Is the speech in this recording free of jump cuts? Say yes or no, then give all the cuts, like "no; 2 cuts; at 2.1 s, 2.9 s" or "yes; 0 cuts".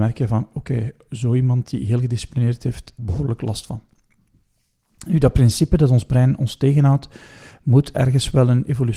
no; 1 cut; at 3.0 s